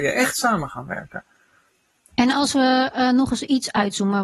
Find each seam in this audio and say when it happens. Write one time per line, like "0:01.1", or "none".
0:02.1